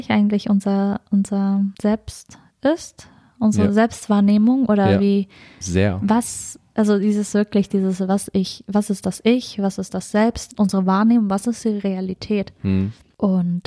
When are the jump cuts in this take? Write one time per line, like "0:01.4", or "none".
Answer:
0:10.5